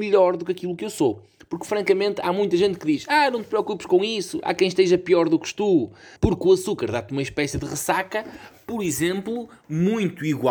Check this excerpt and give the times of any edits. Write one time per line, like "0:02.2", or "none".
0:06.2